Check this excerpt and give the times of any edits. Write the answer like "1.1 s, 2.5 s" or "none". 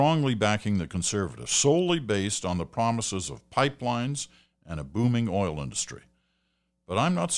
none

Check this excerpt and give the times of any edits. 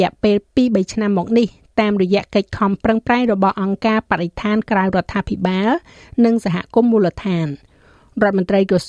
none

